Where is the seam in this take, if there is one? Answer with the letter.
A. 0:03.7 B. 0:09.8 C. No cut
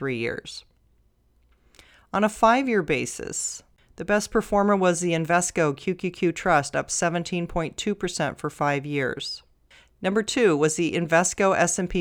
C